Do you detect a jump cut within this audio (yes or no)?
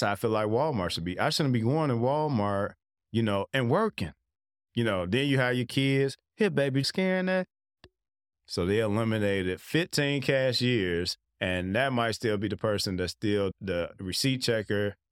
yes